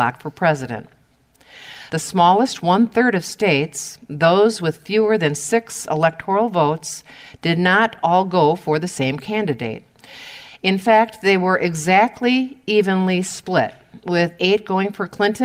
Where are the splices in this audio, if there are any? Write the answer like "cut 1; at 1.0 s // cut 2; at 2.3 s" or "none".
cut 1; at 1.9 s